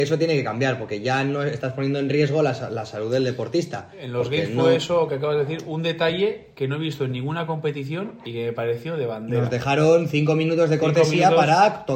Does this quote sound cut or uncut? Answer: uncut